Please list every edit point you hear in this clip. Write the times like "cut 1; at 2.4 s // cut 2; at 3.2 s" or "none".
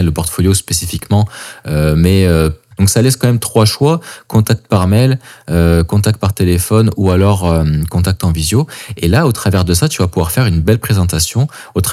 cut 1; at 2.7 s